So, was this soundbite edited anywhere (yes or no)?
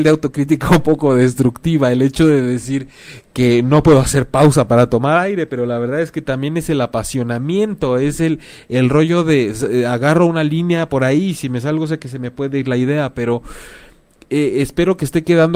no